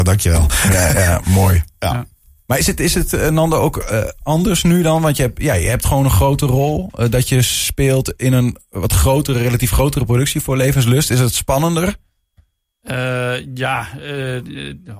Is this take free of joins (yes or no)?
yes